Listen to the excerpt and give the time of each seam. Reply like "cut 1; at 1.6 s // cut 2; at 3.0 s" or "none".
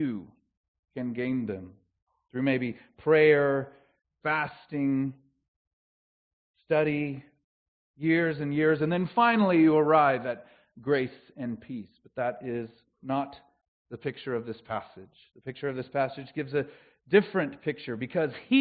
none